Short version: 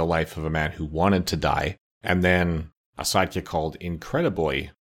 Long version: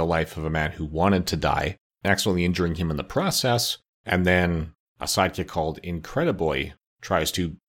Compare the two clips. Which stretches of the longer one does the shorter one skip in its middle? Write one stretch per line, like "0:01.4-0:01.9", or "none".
0:01.9-0:03.9